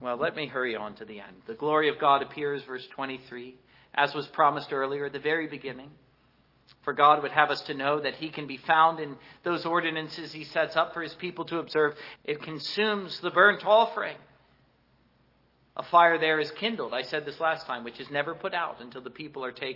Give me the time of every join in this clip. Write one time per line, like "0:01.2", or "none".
0:12.2